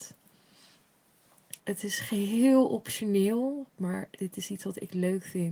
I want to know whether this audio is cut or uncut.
cut